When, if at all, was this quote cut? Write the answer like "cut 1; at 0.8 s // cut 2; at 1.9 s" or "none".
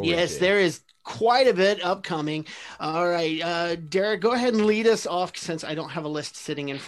none